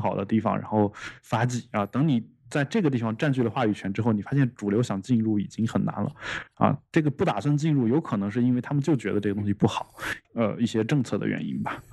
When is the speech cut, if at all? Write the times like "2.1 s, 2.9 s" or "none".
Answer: 6.5 s, 10.2 s